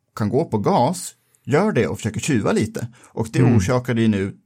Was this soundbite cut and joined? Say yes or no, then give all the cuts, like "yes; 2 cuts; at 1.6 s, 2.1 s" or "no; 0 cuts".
no; 0 cuts